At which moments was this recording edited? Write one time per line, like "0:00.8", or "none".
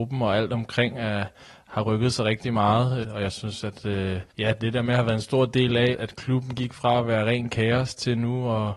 0:03.0
0:04.3
0:05.9